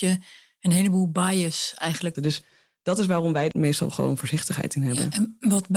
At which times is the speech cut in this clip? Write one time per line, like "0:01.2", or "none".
0:02.2
0:03.5